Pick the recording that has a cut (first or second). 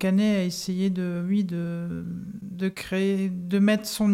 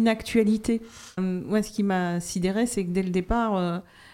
second